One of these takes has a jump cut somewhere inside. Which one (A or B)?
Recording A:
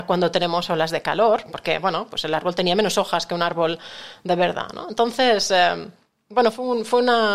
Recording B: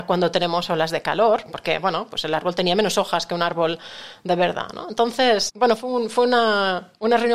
B